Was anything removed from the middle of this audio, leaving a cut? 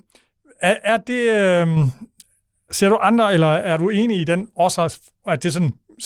no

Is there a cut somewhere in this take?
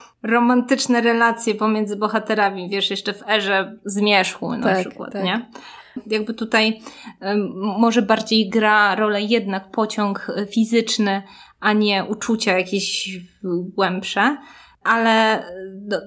yes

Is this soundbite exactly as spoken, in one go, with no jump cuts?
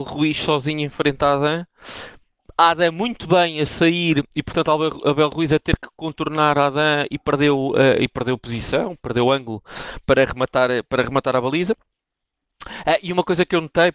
yes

